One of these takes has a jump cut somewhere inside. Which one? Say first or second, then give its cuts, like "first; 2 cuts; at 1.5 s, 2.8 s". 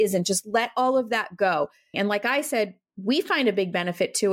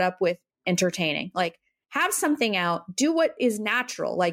first; 1 cut; at 1.9 s